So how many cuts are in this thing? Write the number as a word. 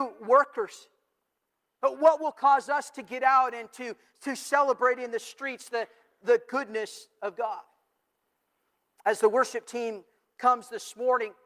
one